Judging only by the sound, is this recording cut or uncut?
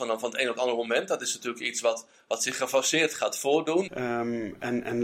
cut